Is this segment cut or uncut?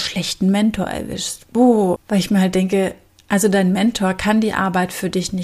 cut